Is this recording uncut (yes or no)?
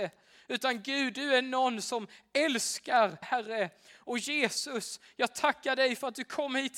no